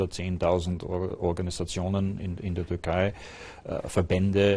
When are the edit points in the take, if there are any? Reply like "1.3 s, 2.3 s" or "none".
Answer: none